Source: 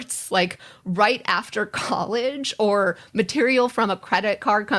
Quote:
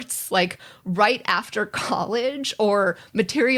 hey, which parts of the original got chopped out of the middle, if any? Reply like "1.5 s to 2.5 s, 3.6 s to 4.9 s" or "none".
none